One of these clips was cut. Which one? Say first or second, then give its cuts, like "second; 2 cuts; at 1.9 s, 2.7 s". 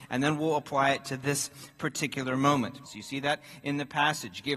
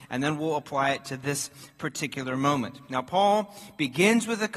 first; 1 cut; at 2.8 s